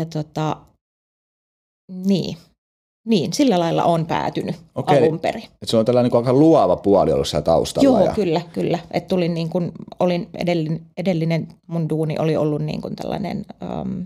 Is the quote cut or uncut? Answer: uncut